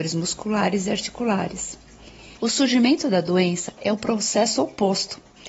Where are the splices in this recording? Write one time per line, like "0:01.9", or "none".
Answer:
0:02.4